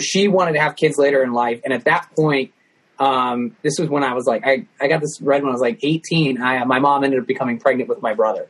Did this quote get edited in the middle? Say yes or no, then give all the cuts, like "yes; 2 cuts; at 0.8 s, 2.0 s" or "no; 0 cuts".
no; 0 cuts